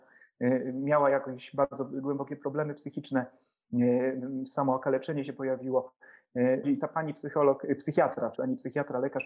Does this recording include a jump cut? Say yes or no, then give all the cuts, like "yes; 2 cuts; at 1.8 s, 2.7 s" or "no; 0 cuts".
yes; 2 cuts; at 6.6 s, 8.3 s